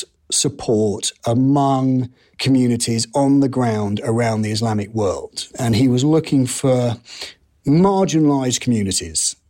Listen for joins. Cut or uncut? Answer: cut